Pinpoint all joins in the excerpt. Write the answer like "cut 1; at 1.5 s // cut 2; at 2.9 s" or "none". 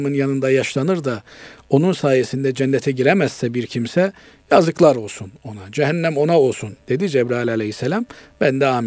none